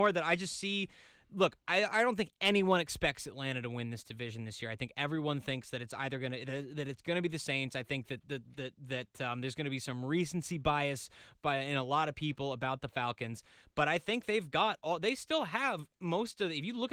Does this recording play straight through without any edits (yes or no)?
yes